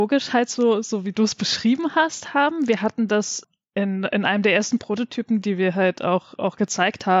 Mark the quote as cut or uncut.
uncut